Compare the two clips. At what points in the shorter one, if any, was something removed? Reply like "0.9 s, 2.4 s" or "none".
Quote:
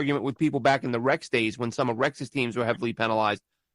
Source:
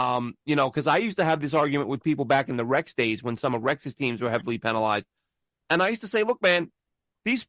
none